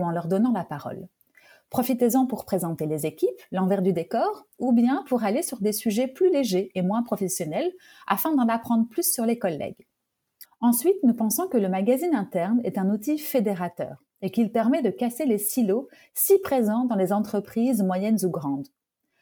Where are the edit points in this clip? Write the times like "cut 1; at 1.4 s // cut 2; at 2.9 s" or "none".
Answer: cut 1; at 10.5 s